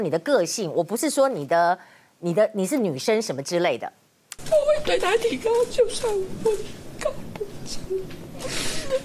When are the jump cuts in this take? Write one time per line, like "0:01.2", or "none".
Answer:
0:04.3